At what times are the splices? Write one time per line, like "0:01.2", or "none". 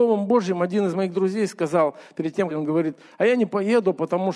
0:02.5